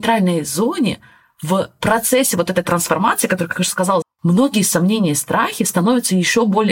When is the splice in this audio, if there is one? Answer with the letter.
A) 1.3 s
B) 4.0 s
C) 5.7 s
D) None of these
B